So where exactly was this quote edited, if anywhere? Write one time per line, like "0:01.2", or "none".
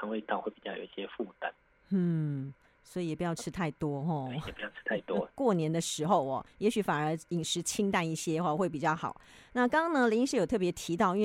0:05.3